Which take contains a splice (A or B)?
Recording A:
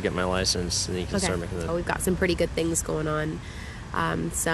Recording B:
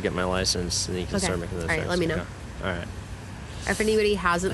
A